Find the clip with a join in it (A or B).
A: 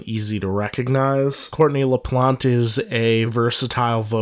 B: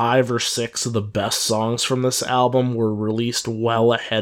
A